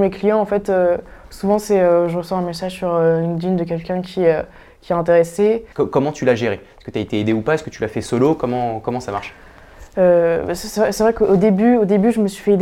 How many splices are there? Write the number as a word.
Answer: one